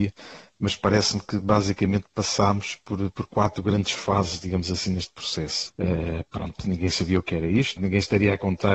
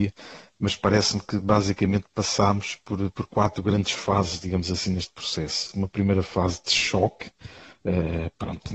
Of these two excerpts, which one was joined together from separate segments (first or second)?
first